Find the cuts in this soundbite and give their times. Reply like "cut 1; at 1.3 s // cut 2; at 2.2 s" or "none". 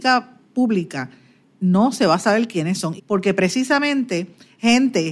cut 1; at 3.0 s